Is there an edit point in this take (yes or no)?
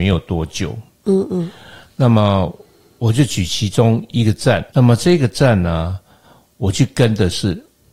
yes